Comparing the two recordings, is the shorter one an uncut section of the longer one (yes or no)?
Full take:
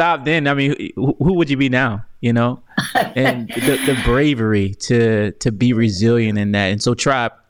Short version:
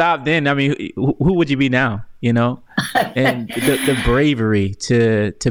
yes